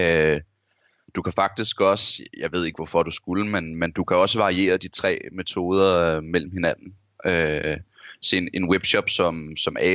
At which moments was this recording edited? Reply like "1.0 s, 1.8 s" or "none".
none